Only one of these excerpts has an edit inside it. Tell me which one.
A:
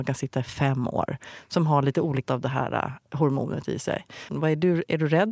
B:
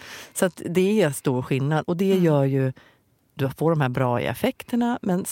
A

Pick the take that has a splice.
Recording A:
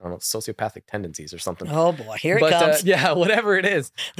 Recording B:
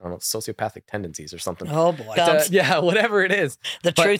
B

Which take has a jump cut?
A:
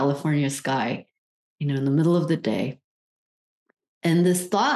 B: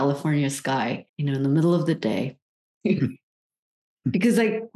B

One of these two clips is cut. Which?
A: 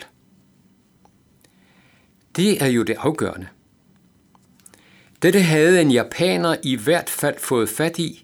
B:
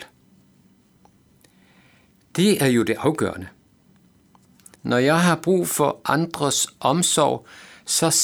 B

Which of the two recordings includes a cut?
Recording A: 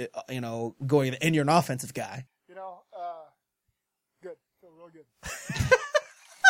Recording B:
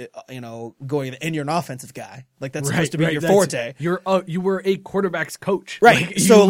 A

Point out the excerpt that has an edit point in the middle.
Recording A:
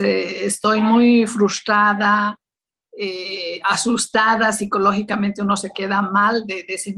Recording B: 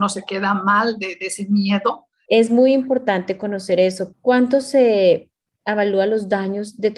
B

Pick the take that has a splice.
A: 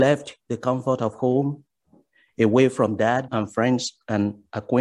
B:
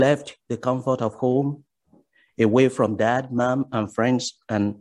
A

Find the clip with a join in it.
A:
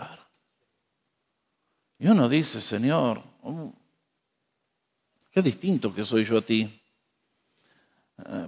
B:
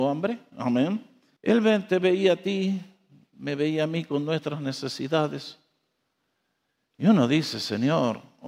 B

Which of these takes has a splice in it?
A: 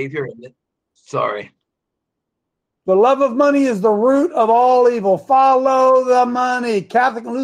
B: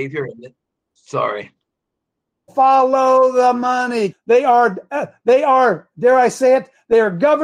B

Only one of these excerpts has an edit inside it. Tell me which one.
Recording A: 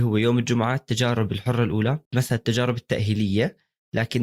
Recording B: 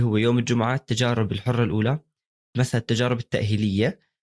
A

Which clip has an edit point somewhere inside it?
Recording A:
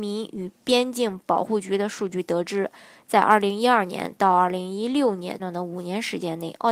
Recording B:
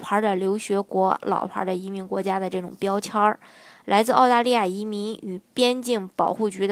A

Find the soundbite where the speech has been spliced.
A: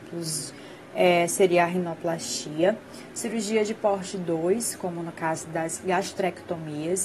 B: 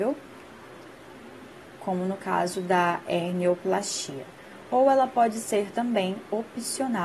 A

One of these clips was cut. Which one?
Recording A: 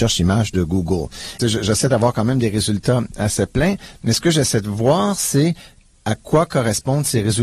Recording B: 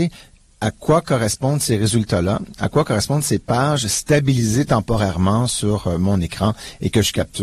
A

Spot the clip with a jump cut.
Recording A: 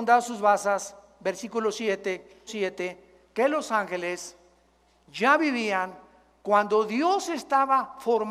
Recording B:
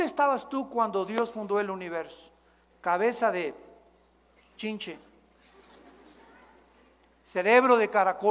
A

